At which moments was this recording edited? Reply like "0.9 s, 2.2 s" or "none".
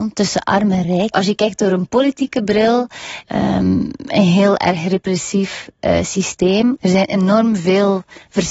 1.1 s, 3.2 s, 6.8 s